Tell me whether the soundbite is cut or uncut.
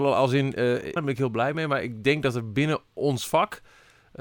cut